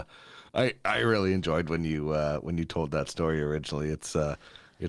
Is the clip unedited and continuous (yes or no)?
yes